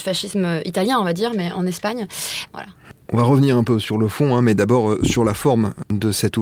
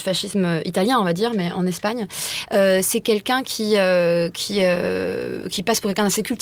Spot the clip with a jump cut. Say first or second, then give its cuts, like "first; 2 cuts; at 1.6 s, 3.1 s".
first; 1 cut; at 2.5 s